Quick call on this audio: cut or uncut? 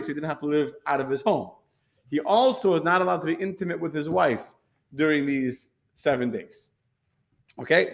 uncut